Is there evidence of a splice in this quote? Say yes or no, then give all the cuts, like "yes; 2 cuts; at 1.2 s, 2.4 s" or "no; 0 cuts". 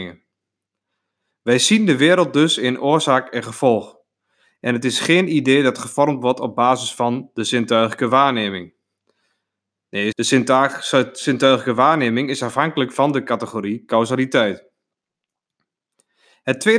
yes; 1 cut; at 10.1 s